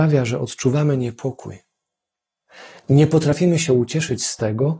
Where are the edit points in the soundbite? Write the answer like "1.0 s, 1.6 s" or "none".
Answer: none